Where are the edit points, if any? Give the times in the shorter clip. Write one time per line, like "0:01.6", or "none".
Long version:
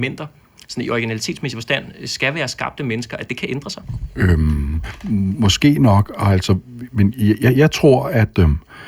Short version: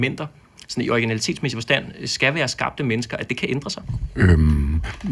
none

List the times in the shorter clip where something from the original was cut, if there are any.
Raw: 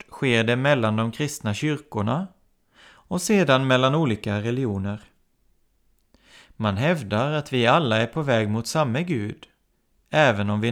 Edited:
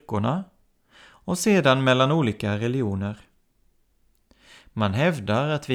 none

